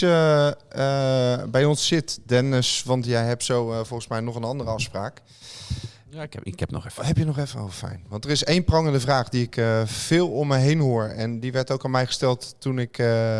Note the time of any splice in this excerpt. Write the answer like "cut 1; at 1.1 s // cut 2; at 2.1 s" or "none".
none

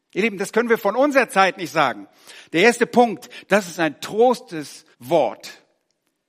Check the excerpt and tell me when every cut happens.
cut 1; at 3.4 s // cut 2; at 4.9 s

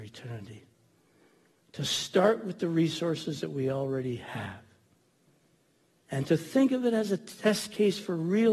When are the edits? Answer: none

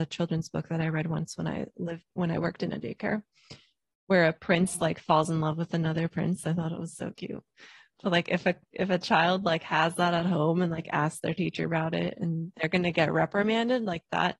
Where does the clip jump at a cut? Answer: none

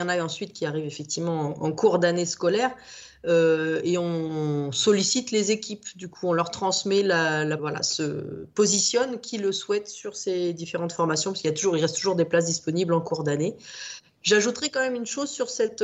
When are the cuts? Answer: cut 1; at 7.6 s

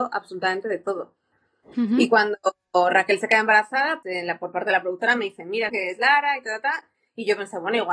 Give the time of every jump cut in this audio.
cut 1; at 1.6 s // cut 2; at 4.0 s // cut 3; at 5.7 s

